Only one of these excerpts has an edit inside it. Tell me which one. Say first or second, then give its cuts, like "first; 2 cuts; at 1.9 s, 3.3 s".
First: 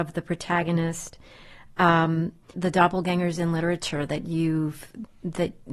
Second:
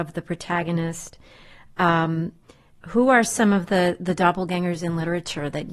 first; 1 cut; at 2.5 s